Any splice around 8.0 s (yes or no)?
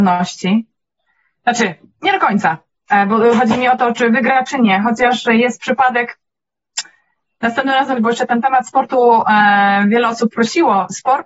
yes